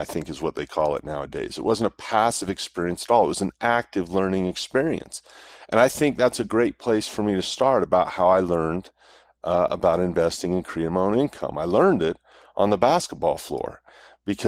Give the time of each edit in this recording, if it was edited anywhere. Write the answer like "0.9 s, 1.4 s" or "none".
none